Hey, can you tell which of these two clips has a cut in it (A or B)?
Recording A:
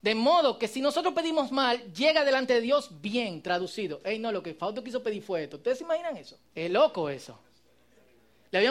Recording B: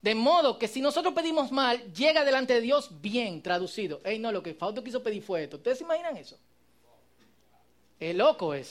A